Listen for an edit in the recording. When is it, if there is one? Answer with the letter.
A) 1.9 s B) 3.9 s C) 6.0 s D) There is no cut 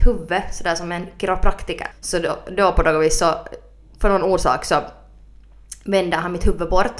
A